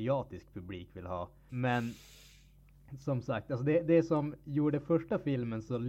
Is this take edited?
yes; 1 cut; at 1.5 s

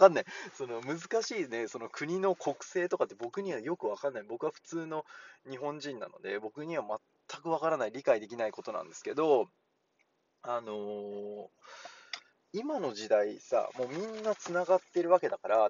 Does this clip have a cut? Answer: no; 0 cuts

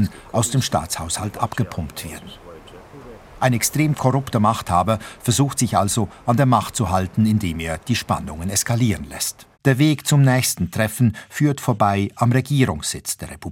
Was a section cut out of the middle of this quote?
yes; 1 cut; at 9.5 s

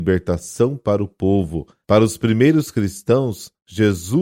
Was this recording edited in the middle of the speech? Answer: yes; 1 cut; at 1.8 s

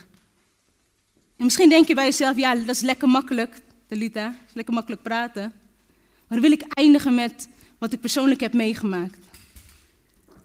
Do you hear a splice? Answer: no; 0 cuts

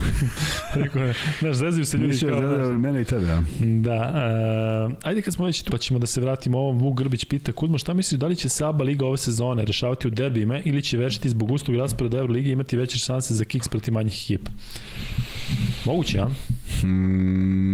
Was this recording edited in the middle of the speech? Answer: yes; 1 cut; at 5.7 s

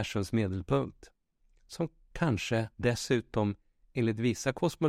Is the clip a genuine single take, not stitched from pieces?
no; 2 cuts; at 1.6 s, 2.7 s

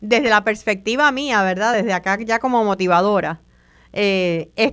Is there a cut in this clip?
no; 0 cuts

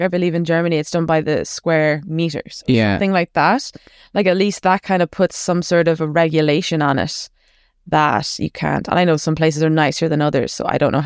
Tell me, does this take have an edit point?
no; 0 cuts

